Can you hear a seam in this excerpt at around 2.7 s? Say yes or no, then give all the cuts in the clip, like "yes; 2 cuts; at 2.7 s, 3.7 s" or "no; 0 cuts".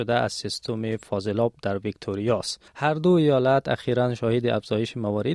yes; 1 cut; at 2.7 s